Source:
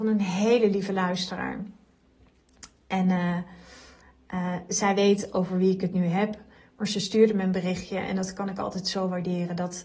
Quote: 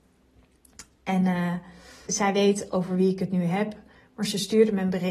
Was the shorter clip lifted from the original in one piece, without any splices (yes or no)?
no